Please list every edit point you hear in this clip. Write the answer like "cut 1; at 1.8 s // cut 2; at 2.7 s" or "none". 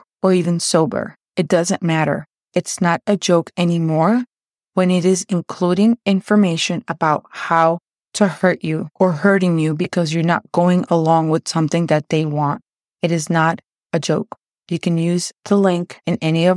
cut 1; at 14.5 s

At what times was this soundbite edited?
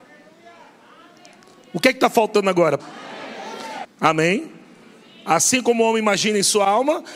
cut 1; at 2.8 s // cut 2; at 3.8 s

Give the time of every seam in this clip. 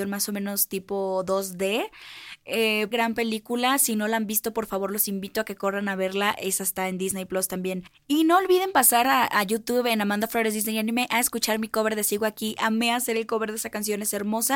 cut 1; at 2.9 s

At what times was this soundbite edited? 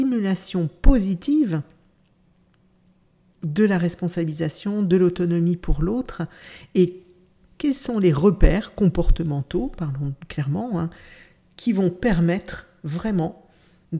none

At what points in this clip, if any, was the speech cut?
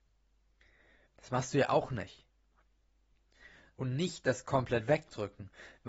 cut 1; at 1.1 s // cut 2; at 3.7 s

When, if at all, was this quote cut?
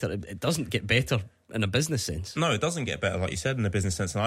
none

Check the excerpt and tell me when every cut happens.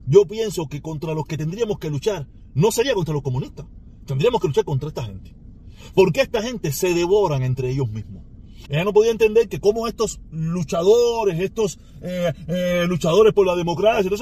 cut 1; at 8.7 s

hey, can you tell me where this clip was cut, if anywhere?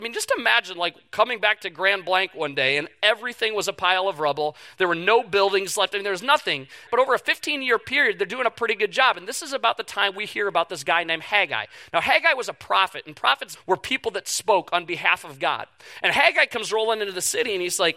cut 1; at 6.9 s // cut 2; at 13.6 s

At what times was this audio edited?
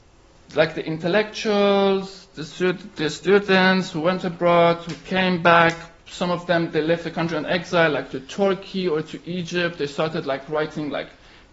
none

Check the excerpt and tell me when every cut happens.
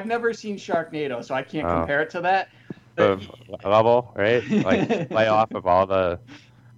cut 1; at 3.0 s

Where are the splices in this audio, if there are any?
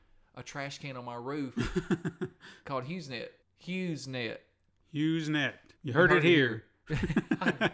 cut 1; at 3.4 s // cut 2; at 5.8 s

